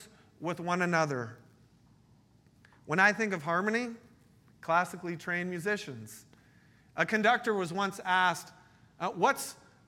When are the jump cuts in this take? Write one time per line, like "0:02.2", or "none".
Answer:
0:04.4